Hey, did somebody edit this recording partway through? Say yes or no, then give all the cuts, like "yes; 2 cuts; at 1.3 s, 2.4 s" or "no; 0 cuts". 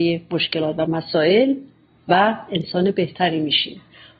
no; 0 cuts